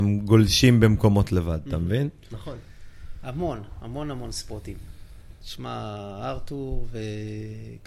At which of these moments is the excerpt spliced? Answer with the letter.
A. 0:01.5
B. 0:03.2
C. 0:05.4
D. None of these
D